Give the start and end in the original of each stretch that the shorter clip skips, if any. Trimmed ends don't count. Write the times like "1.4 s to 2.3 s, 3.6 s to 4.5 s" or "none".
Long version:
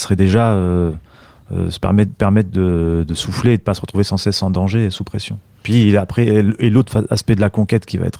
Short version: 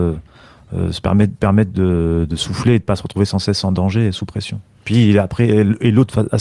none